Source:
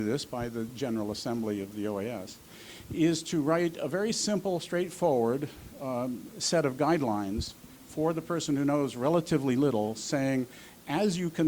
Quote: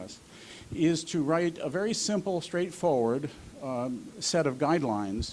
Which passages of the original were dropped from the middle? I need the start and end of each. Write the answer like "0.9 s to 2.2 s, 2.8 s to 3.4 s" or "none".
none